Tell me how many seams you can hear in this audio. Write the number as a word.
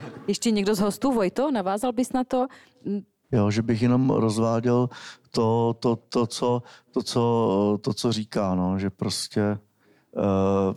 one